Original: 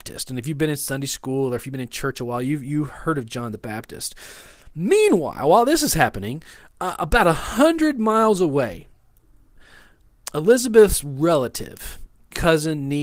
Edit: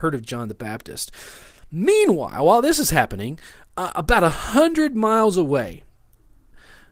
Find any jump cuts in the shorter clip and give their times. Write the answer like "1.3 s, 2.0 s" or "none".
none

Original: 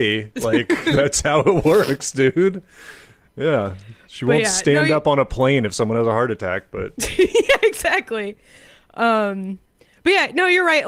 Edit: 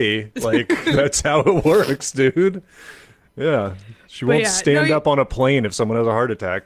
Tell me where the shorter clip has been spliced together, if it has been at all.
none

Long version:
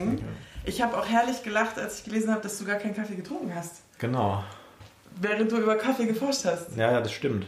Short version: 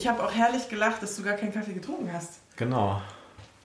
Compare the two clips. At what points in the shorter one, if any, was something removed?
1.0 s

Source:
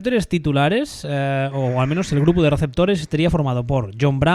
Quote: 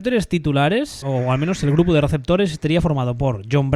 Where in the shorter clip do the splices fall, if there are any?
1.0 s

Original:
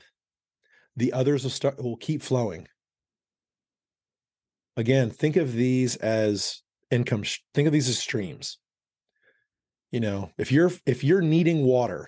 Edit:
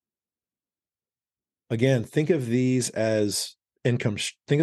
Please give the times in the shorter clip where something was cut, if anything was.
none

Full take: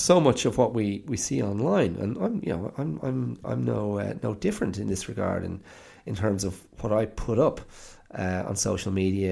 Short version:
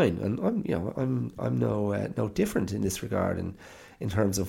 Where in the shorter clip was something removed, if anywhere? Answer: 1.0 s

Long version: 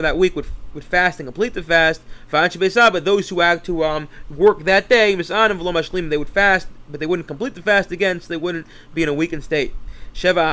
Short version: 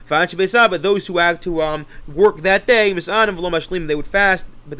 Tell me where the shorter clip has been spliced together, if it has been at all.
none

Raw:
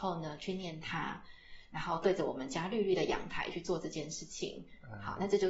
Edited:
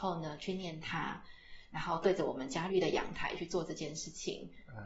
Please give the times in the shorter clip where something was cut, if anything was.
2.7 s

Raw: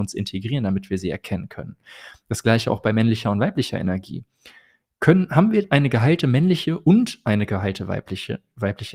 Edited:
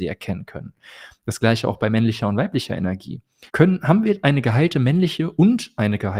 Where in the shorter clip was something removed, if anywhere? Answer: 3.5 s

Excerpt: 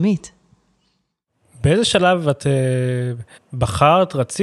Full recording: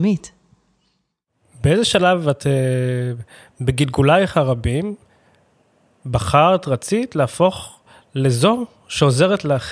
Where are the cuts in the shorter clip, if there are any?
3.4 s

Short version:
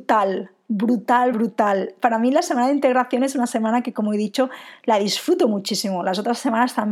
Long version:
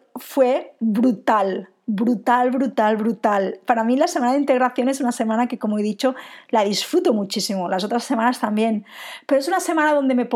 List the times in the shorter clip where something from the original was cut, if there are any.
1.3 s

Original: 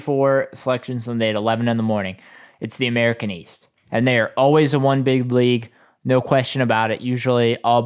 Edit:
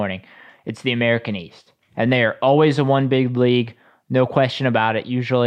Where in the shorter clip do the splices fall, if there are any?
none

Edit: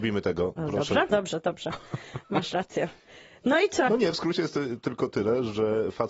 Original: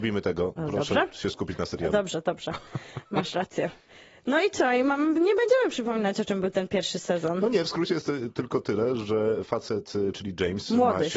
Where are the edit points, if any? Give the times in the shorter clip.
1.1 s, 3.9 s

